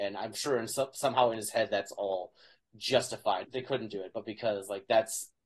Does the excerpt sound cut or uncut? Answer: cut